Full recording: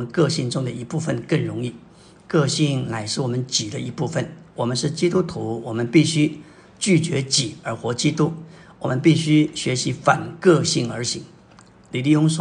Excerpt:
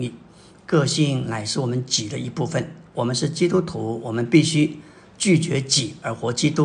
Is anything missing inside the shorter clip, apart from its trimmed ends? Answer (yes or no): no